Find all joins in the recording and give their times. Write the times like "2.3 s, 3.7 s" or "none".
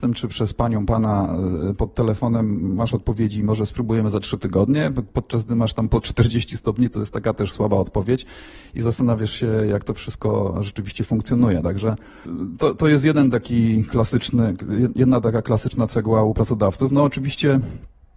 none